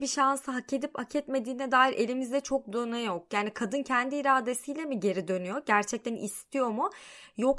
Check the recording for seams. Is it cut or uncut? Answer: uncut